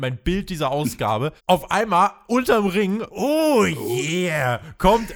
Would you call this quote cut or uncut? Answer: cut